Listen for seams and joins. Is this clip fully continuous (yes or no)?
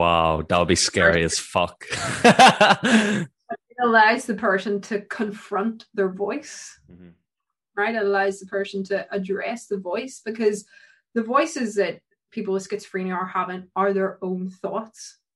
yes